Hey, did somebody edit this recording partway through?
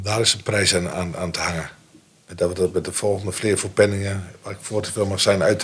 no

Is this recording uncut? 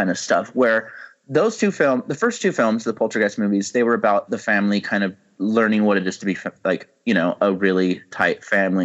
yes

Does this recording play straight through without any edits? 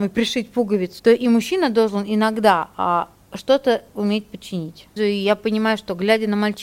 no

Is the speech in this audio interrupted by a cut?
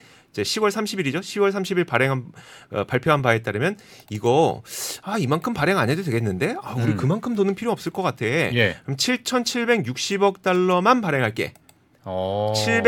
no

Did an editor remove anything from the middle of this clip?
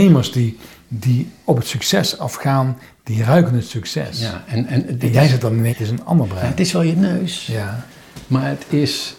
yes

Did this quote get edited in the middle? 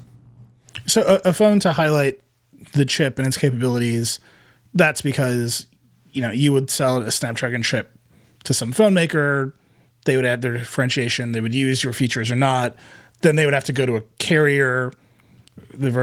no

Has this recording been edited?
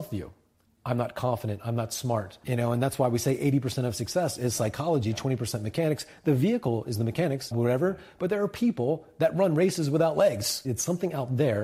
yes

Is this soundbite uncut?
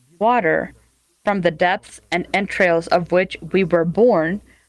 yes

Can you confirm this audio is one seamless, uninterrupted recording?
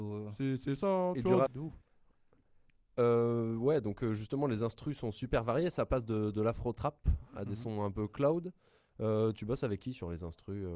no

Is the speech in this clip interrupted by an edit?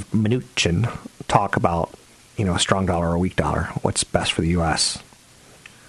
no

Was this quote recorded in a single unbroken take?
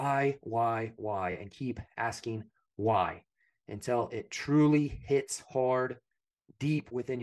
yes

